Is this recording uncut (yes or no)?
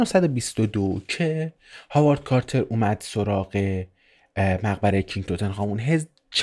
yes